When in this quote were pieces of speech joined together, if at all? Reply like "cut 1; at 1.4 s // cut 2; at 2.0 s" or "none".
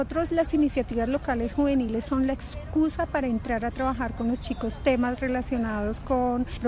none